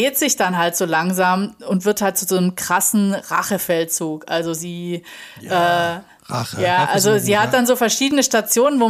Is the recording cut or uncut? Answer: uncut